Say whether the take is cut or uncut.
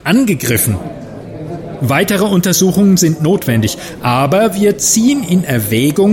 uncut